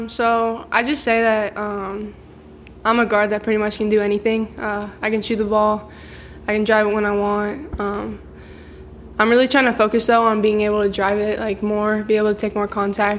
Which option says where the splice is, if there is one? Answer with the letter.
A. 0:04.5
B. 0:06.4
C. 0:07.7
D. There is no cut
C